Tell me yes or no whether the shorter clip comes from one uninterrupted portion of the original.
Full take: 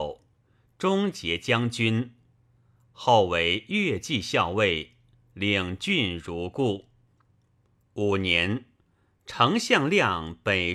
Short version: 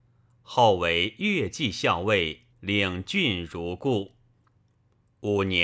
no